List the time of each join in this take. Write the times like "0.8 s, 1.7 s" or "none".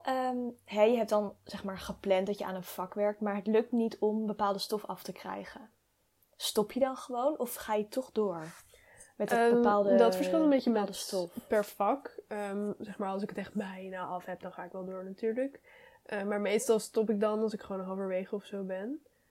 none